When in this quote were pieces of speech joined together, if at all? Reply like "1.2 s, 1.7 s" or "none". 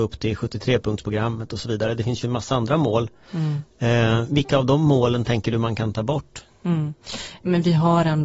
none